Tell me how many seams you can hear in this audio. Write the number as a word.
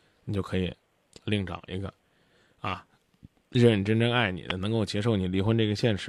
zero